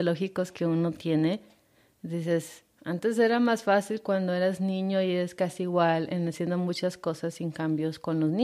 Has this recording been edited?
no; 0 cuts

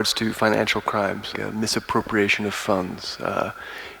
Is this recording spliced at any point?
yes; 1 cut; at 1.3 s

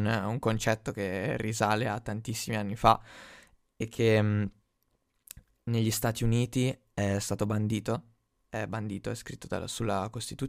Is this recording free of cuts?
yes; 0 cuts

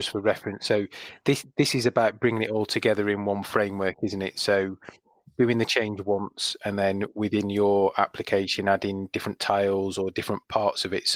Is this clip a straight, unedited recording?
yes; 0 cuts

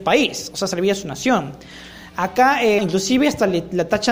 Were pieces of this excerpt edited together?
yes; 1 cut; at 2.8 s

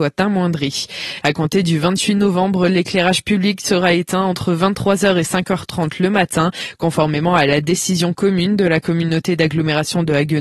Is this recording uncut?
no; 1 cut; at 1.2 s

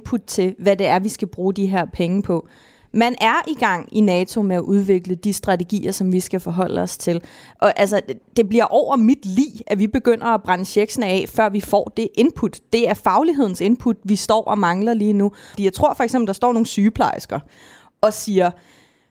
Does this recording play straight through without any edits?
no; 1 cut; at 15.5 s

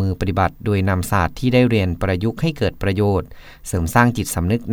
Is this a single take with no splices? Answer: no; 1 cut; at 2.0 s

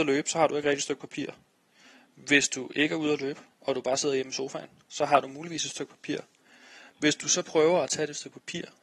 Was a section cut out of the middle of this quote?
no; 0 cuts

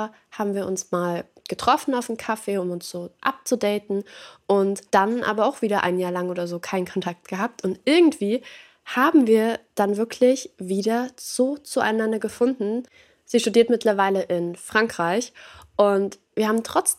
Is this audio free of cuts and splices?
no; 1 cut; at 4.9 s

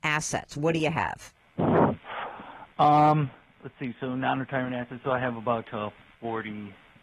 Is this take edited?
no; 0 cuts

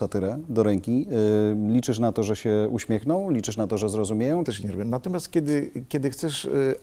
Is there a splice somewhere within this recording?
yes; 1 cut; at 4.4 s

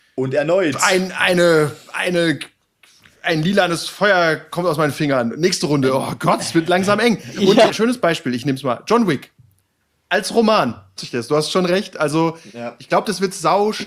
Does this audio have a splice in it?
yes; 2 cuts; at 7.7 s, 11.0 s

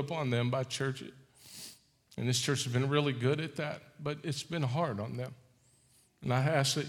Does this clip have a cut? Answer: no; 0 cuts

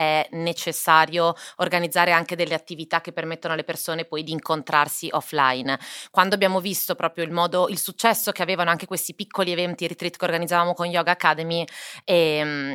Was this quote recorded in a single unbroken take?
yes; 0 cuts

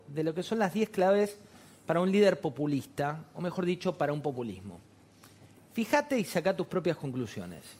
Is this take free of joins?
yes; 0 cuts

